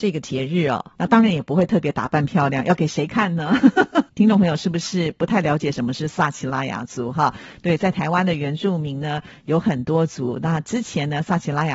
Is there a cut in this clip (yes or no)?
yes